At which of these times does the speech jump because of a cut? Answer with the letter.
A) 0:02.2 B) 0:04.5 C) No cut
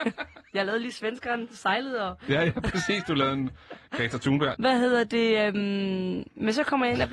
B